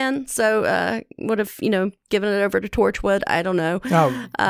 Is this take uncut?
yes; 0 cuts

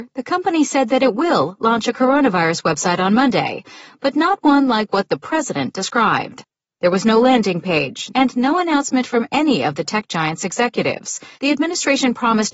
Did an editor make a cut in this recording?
yes; 3 cuts; at 6.7 s, 8.1 s, 11.3 s

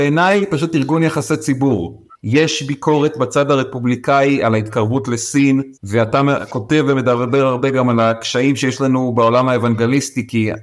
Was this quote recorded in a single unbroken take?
no; 2 cuts; at 2.1 s, 5.8 s

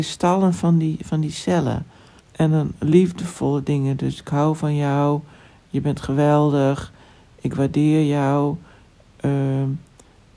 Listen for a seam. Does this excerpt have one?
yes; 1 cut; at 2.2 s

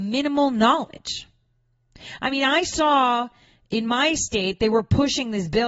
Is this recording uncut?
yes; 0 cuts

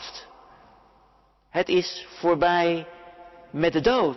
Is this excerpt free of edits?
yes; 0 cuts

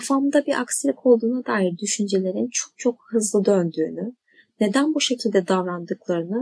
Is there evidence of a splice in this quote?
no; 0 cuts

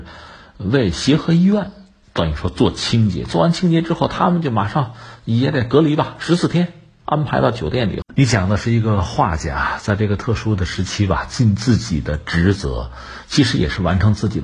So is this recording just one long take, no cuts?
no; 1 cut; at 8.0 s

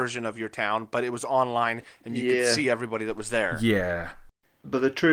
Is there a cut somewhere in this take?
no; 0 cuts

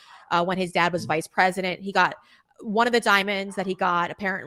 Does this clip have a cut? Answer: no; 0 cuts

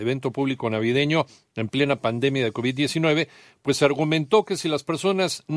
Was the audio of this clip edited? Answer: no; 0 cuts

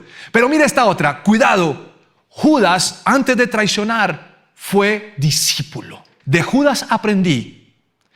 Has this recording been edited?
yes; 1 cut; at 6.2 s

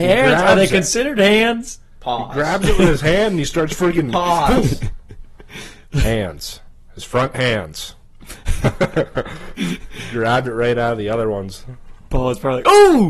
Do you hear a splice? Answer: no; 0 cuts

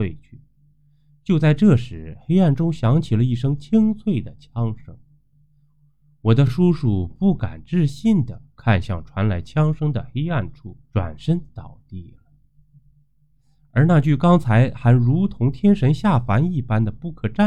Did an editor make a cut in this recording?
no; 0 cuts

